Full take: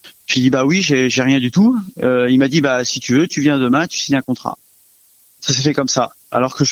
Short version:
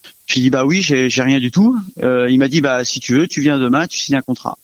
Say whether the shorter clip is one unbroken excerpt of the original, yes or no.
yes